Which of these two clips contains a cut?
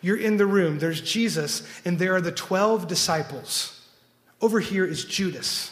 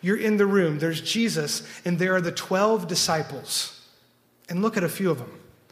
first; 1 cut; at 4.3 s

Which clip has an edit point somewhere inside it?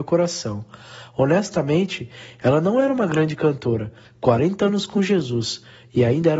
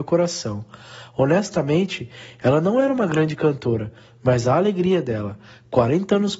first; 1 cut; at 4.0 s

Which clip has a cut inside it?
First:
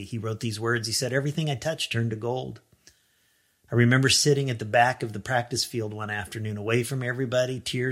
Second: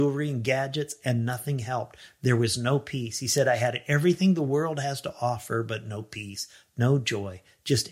first; 1 cut; at 3.7 s

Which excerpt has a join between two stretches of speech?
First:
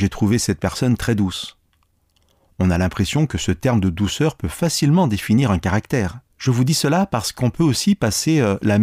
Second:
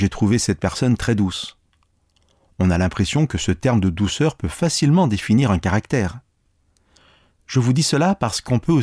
first; 1 cut; at 6.3 s

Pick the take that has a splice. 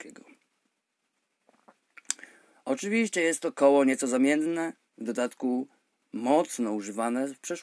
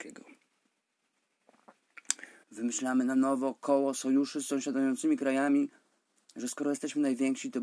second; 2 cuts; at 2.4 s, 6.2 s

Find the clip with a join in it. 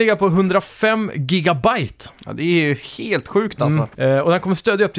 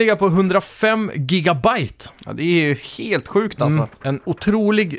first; 1 cut; at 3.9 s

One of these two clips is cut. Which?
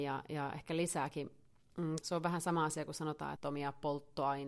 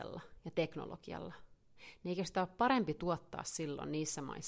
first; 2 cuts; at 2.0 s, 3.4 s

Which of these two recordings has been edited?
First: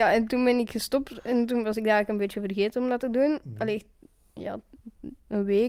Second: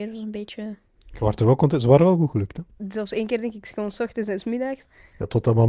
second; 1 cut; at 2.8 s

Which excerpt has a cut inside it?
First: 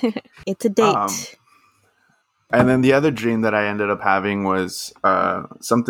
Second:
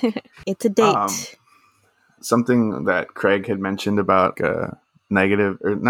second; 2 cuts; at 2.2 s, 4.3 s

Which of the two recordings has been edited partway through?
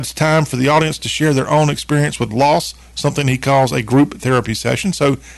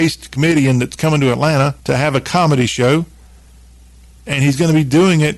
second; 1 cut; at 1.8 s

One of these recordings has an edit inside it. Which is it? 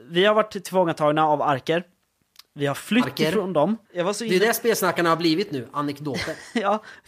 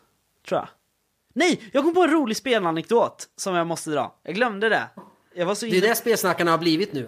first; 1 cut; at 3.9 s

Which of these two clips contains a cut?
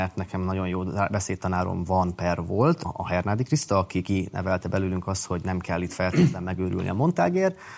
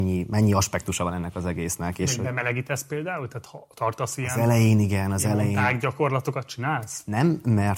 first; 1 cut; at 2.8 s

